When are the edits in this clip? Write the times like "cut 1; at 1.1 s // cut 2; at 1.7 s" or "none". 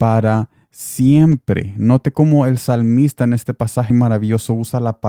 cut 1; at 3.9 s